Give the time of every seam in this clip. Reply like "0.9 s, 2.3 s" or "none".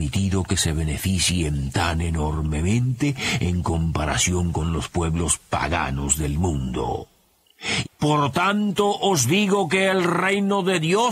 7.8 s